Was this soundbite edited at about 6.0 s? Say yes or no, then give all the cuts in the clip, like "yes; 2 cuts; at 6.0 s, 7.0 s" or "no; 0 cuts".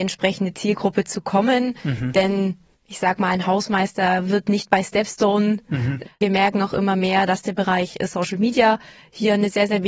yes; 1 cut; at 6.0 s